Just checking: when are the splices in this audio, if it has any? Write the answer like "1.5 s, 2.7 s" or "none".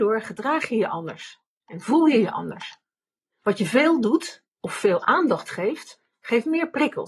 none